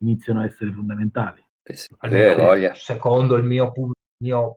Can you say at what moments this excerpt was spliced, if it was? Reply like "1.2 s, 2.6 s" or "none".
1.9 s